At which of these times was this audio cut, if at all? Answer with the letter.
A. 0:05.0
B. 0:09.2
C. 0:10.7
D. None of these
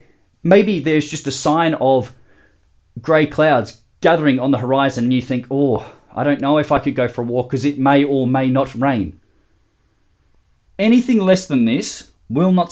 C